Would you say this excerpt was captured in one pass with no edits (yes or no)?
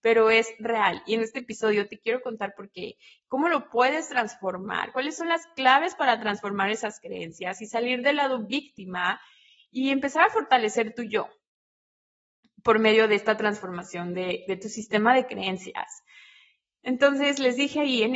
yes